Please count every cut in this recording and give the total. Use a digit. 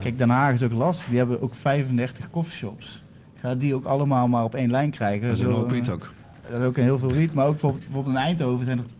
0